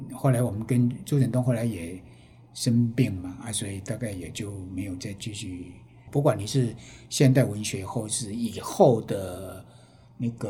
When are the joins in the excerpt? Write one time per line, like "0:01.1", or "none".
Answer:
0:06.1

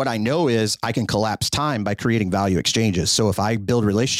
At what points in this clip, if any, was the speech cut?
none

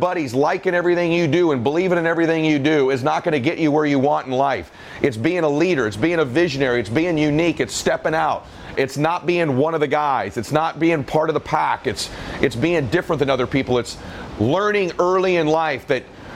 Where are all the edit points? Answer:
0:08.8
0:13.7

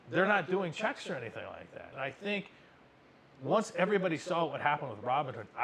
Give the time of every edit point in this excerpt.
0:01.9

